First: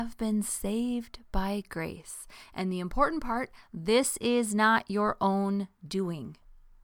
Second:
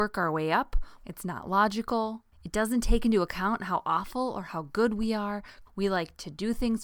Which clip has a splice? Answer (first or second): second